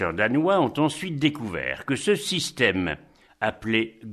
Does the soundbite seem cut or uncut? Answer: uncut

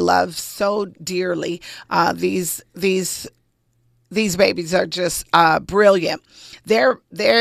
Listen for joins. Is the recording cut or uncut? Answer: uncut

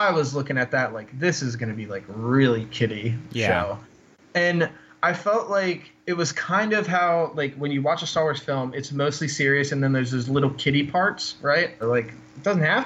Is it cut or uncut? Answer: cut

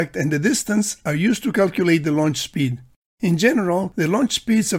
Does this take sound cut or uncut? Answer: uncut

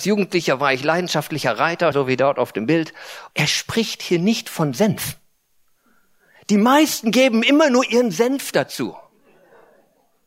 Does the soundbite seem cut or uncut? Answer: cut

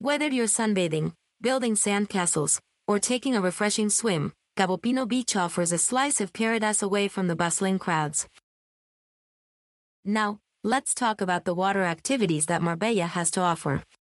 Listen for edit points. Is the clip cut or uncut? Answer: uncut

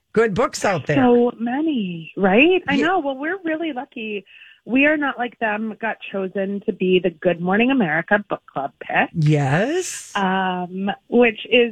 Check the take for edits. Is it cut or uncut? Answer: uncut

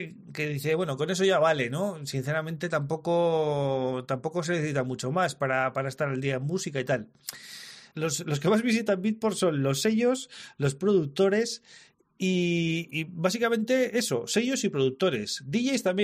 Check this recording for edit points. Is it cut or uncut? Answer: cut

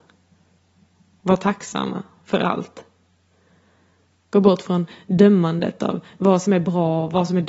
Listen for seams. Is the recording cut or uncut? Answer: uncut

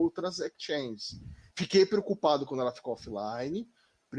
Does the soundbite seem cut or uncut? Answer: uncut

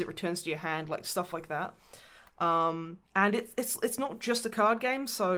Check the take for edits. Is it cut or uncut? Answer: cut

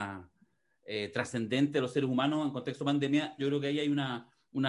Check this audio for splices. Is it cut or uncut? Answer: cut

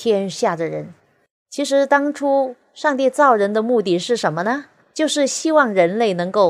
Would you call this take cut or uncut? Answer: cut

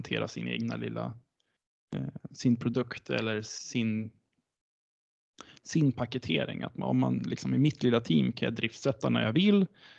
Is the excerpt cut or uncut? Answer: uncut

